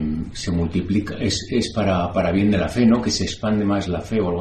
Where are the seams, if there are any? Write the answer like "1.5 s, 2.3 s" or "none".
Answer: none